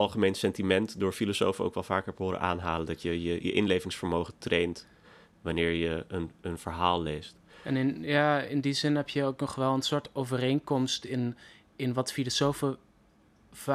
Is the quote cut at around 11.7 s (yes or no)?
no